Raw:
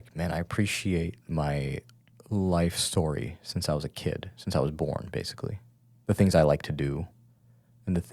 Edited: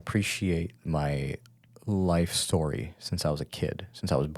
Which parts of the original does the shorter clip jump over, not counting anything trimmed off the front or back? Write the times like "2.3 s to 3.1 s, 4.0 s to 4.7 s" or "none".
none

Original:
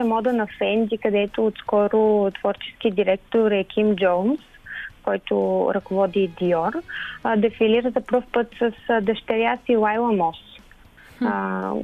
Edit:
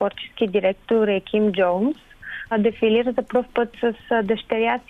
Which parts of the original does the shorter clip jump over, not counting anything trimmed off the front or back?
4.9 s to 7.3 s

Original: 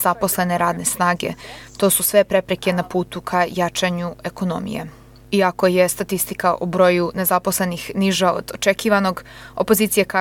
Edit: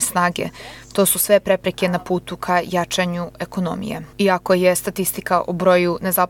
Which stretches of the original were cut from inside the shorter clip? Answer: 5.0 s to 5.3 s

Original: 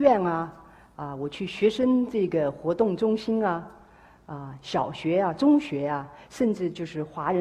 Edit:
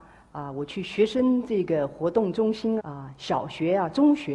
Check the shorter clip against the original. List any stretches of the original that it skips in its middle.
3.4 s to 4.2 s

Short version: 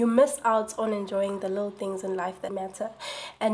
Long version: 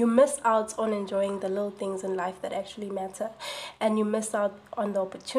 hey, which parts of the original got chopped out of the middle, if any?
2.5 s to 2.9 s

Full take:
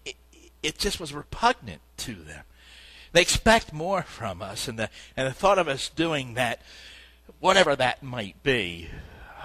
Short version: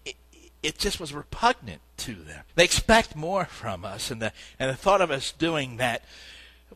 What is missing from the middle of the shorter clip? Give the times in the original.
2.5 s to 3.1 s

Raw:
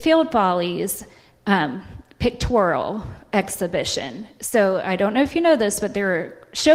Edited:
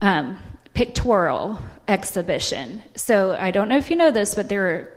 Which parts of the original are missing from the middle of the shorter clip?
none

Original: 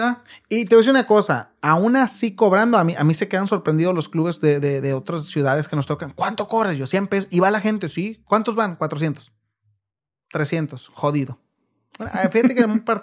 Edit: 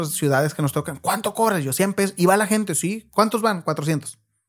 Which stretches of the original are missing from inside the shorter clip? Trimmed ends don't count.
none

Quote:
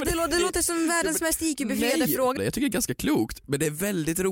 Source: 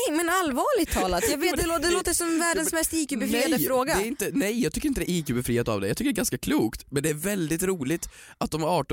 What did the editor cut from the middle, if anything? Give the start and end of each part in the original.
3.9 s to 5.8 s

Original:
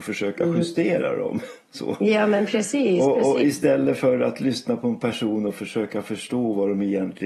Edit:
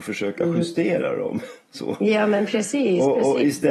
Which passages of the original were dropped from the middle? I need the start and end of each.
none

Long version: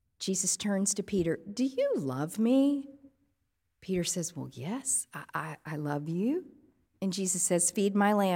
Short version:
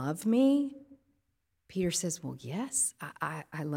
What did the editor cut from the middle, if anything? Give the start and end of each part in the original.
none

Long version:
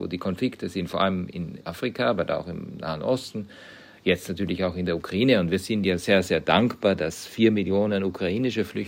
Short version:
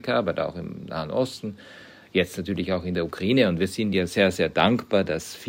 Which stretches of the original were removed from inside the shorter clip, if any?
none

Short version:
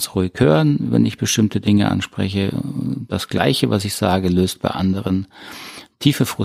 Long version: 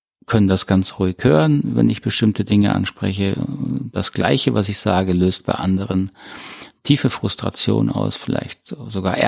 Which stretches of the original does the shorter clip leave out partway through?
none

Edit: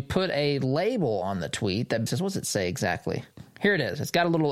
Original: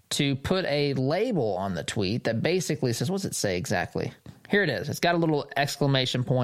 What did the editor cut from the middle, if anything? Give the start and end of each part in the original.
2.4 s to 2.9 s

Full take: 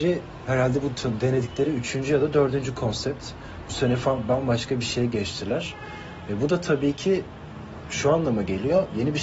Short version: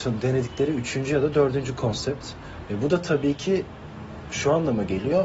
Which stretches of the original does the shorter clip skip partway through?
3.7 s to 6.3 s

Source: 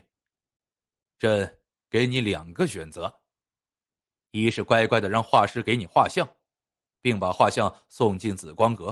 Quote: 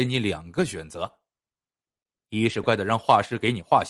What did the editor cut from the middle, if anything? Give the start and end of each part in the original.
4.7 s to 4.9 s

